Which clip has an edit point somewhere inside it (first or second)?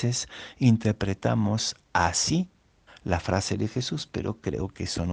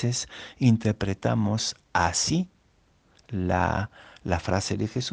first